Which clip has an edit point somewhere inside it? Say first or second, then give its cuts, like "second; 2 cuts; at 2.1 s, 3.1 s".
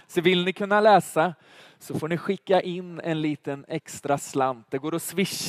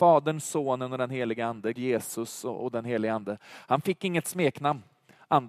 second; 1 cut; at 1.7 s